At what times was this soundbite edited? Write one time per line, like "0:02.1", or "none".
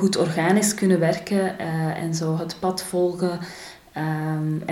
none